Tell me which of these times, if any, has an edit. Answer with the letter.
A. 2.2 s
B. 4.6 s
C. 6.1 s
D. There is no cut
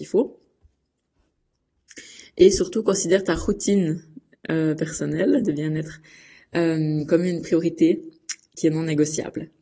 D